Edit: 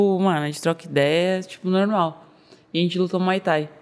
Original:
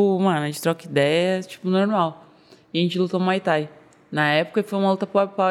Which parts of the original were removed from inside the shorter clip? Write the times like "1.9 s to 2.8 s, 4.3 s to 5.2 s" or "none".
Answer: none